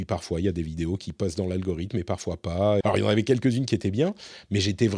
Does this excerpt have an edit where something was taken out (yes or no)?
yes